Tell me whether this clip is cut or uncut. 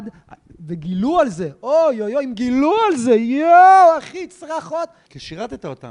uncut